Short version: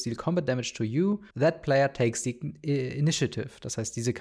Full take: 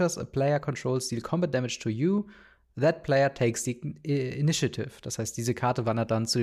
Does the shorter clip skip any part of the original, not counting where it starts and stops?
yes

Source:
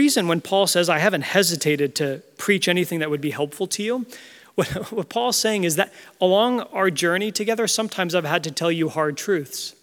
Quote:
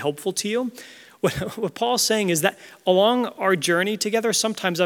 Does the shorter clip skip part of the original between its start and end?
no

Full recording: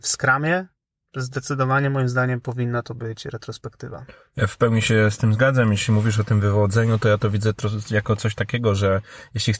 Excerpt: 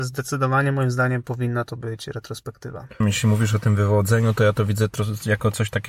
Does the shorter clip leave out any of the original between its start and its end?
yes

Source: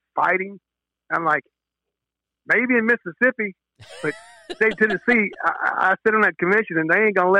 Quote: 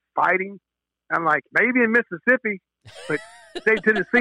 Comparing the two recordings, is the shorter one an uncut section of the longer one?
no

